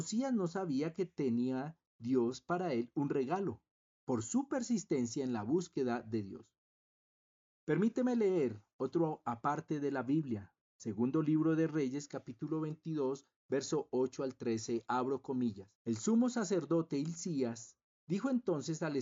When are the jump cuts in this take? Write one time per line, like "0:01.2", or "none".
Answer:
0:15.7